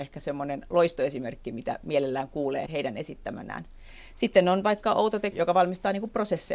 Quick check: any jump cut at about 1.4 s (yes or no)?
no